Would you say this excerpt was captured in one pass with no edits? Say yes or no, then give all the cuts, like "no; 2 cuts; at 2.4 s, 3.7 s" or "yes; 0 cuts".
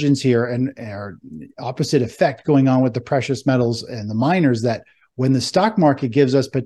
yes; 0 cuts